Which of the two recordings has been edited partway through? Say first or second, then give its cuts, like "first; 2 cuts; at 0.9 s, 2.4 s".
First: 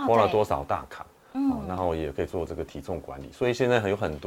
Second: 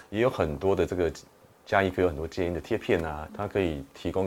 second; 1 cut; at 3.3 s